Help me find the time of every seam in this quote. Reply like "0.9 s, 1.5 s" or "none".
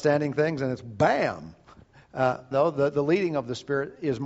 2.5 s